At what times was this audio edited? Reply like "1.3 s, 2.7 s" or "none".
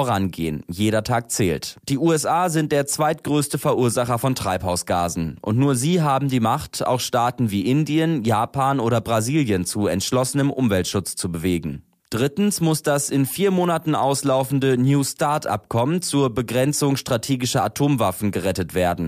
none